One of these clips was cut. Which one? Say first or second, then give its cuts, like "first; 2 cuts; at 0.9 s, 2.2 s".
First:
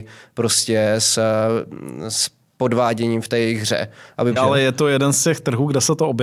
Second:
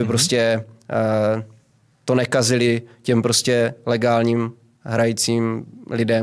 first; 1 cut; at 4.4 s